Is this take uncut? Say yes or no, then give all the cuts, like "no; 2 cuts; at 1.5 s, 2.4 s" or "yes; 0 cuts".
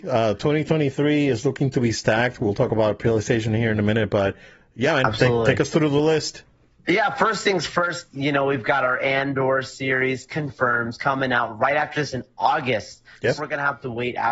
no; 1 cut; at 13.4 s